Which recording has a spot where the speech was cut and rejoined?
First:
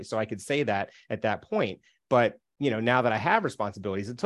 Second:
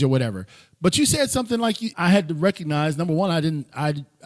second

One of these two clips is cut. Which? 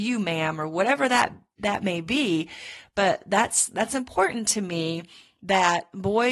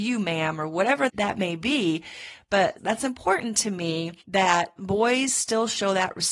second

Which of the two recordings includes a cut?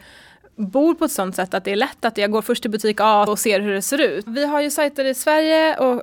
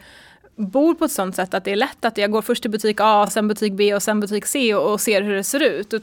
first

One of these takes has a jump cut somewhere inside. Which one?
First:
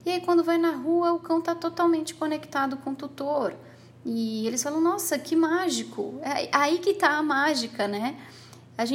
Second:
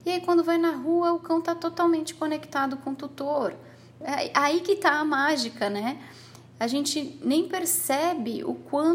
second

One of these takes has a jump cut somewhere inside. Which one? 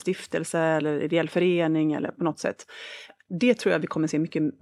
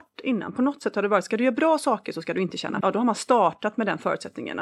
second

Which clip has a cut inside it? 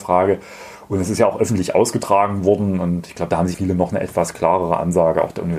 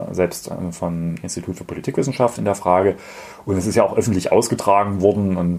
first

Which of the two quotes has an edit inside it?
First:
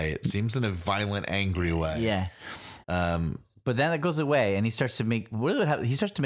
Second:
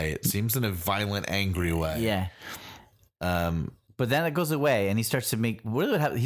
first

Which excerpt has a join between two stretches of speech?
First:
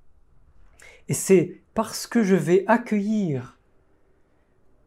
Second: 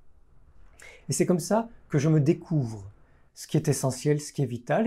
second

